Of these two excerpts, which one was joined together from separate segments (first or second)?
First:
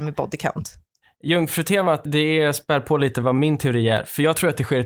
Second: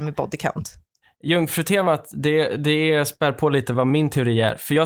first